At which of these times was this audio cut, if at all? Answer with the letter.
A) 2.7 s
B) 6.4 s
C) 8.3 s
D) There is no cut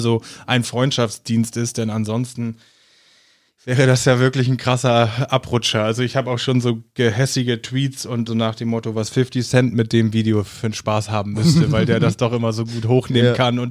C